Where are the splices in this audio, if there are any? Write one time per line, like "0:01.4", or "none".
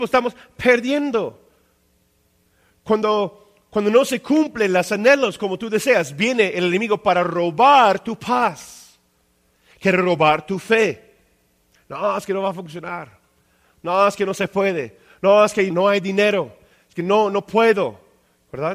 0:15.7